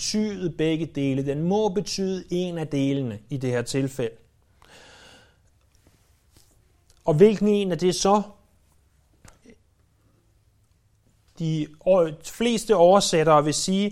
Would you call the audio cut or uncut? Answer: uncut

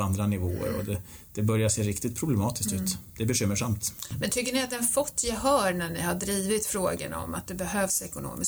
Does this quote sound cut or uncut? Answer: uncut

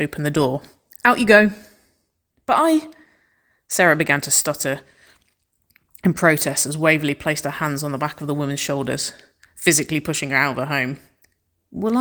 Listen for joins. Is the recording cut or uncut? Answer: uncut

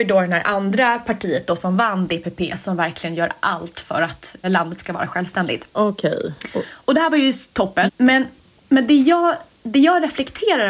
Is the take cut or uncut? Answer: cut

